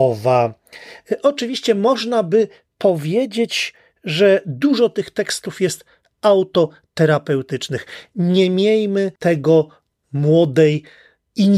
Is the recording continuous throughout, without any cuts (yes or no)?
no